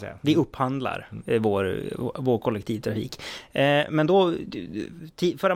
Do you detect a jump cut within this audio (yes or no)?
no